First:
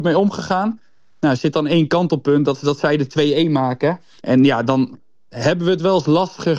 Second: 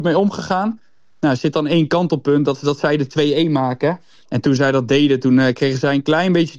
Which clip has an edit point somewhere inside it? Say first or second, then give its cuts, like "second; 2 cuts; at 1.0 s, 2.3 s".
first; 1 cut; at 4.2 s